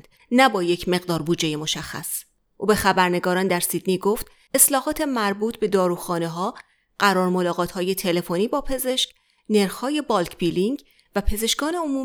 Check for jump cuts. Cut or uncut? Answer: uncut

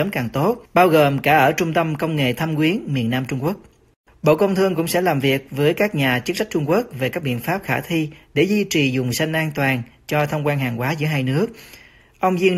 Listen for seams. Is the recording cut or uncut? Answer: cut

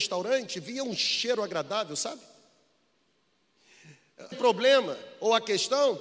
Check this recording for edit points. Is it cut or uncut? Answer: cut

